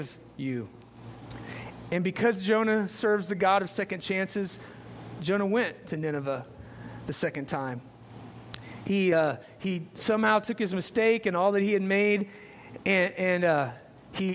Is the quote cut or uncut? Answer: uncut